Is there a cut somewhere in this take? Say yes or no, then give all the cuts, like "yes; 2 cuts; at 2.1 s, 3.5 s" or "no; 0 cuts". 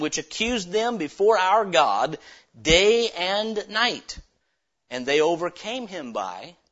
no; 0 cuts